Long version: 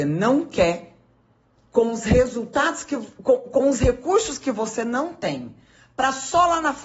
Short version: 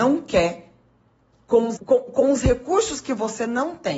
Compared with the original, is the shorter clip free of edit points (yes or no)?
no